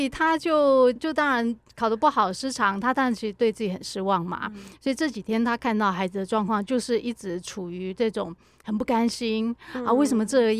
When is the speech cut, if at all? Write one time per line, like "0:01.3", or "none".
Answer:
0:01.0